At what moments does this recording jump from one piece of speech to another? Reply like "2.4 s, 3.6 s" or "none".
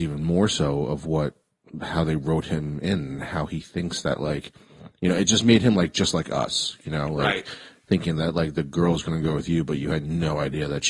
none